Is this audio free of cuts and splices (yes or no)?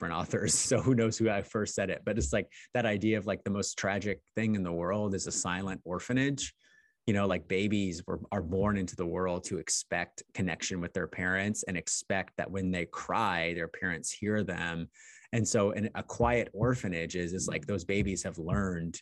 yes